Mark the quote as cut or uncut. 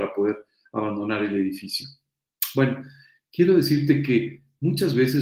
uncut